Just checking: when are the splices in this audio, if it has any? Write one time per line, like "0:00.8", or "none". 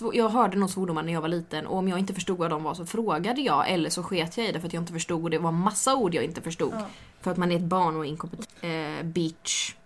0:07.1
0:08.4